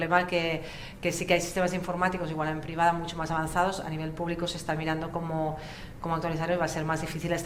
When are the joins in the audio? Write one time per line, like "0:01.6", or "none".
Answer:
none